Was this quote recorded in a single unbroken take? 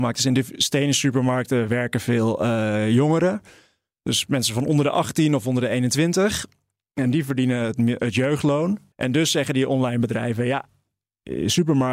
no; 1 cut; at 8.9 s

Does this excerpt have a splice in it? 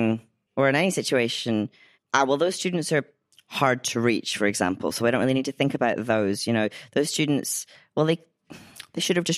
yes; 1 cut; at 1.9 s

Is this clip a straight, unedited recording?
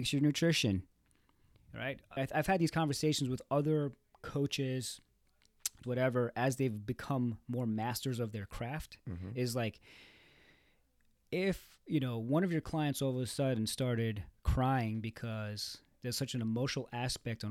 no; 2 cuts; at 2.2 s, 5.8 s

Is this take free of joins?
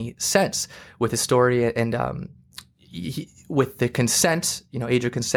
yes; 0 cuts

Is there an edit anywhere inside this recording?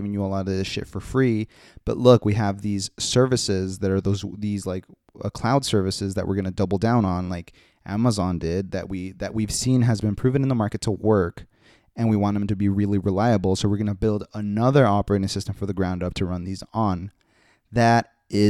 no; 0 cuts

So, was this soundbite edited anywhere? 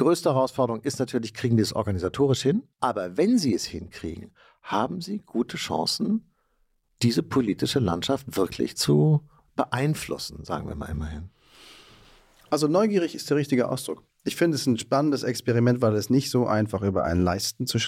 yes; 1 cut; at 2.7 s

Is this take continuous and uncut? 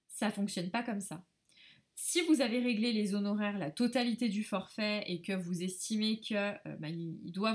yes; 0 cuts

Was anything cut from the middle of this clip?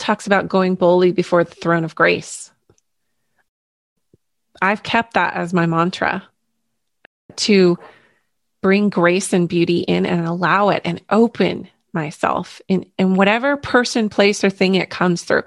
no; 0 cuts

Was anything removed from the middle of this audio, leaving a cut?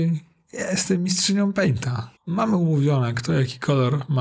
yes; 1 cut; at 2.2 s

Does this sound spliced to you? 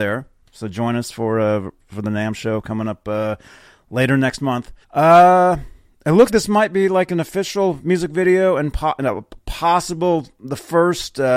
yes; 2 cuts; at 4.8 s, 6.3 s

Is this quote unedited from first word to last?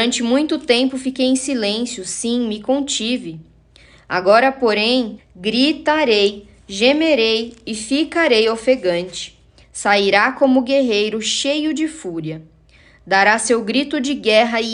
no; 2 cuts; at 5.2 s, 9.6 s

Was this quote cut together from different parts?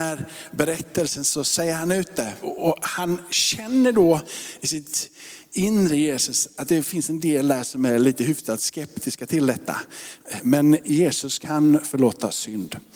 yes; 2 cuts; at 2.4 s, 10.4 s

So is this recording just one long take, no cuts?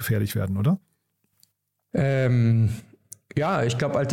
yes; 0 cuts

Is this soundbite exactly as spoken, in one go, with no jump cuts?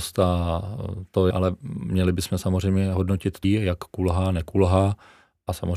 no; 2 cuts; at 1.3 s, 3.4 s

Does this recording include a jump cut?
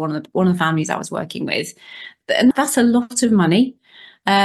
yes; 1 cut; at 2.5 s

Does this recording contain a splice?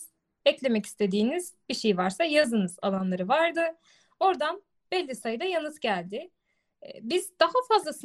no; 0 cuts

